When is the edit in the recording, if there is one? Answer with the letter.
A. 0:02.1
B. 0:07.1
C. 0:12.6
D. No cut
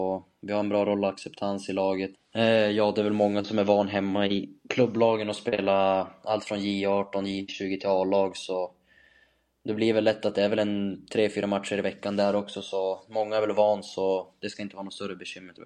A